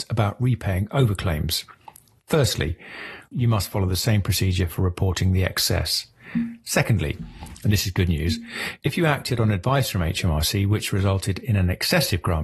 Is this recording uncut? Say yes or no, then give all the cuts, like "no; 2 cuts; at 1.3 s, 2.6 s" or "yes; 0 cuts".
no; 1 cut; at 3.3 s